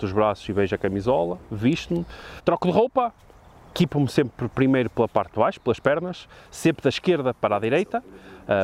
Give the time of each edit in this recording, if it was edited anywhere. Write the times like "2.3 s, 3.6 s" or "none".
2.4 s